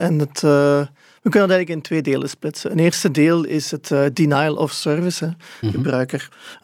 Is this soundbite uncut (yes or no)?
no